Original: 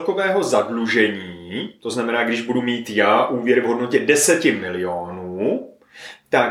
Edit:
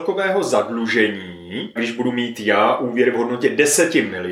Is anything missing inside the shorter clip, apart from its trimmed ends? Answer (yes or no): yes